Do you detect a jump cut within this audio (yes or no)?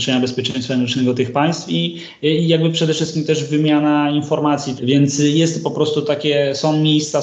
yes